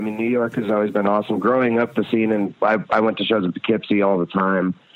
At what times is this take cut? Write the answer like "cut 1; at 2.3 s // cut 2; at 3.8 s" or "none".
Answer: none